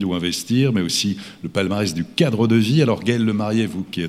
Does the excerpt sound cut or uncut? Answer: uncut